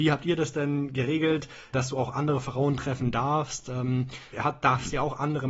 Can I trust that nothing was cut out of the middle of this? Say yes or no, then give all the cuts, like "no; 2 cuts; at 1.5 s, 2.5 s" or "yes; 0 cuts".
no; 2 cuts; at 1.7 s, 4.3 s